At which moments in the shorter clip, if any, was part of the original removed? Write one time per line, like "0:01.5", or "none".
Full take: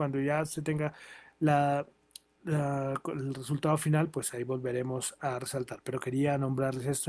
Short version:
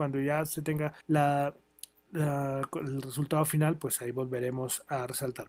0:01.0